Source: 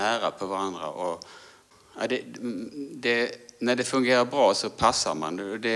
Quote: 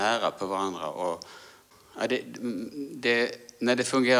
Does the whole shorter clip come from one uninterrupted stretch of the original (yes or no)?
yes